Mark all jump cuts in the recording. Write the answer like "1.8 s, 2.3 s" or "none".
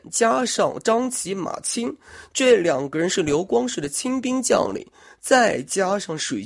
none